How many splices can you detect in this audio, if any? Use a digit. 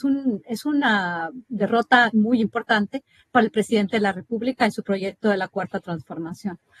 0